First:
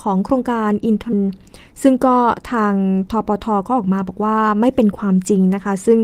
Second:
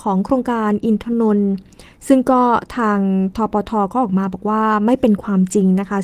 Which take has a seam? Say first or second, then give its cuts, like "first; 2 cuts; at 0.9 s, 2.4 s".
first; 1 cut; at 1.1 s